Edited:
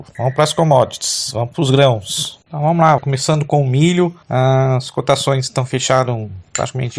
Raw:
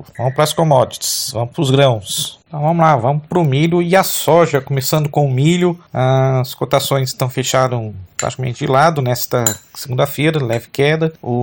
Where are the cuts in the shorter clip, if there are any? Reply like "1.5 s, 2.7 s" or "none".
3.0 s